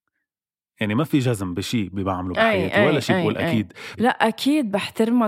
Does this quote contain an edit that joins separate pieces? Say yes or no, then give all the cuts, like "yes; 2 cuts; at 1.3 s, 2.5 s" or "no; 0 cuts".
yes; 1 cut; at 4.0 s